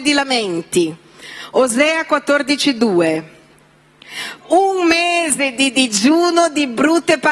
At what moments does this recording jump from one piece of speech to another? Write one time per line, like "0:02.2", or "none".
0:04.4